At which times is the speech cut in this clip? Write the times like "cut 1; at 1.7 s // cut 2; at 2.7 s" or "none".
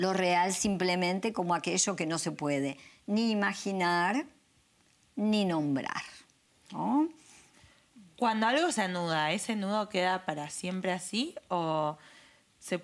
none